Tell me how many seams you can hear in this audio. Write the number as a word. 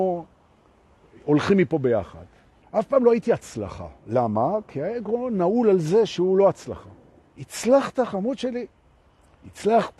two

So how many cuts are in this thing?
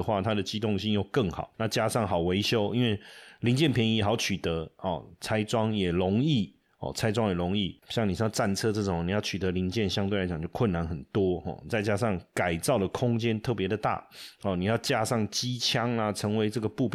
one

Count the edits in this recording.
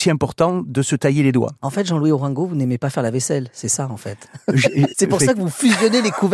two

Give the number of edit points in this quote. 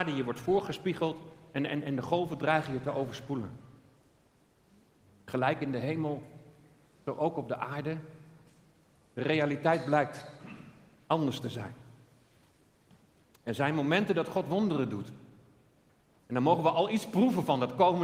zero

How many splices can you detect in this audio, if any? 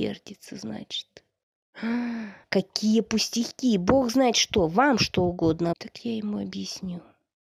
two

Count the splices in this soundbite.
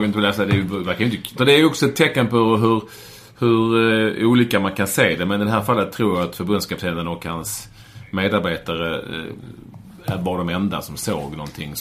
one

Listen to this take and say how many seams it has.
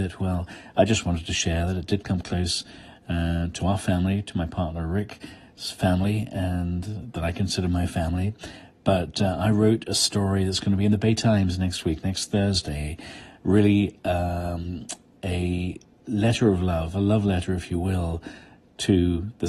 zero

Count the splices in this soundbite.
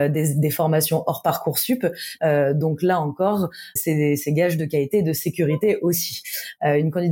two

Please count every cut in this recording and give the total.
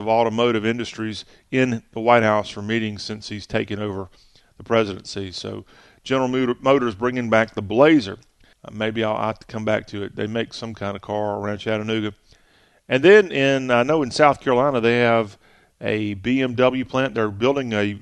one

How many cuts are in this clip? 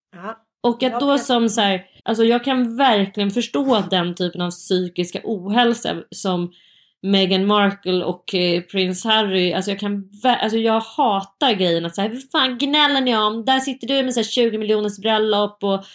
one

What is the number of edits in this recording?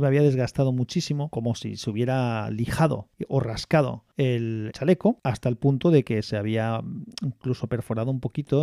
zero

